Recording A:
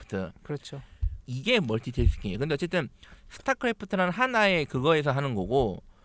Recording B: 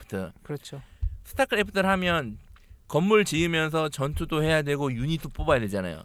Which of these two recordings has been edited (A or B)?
A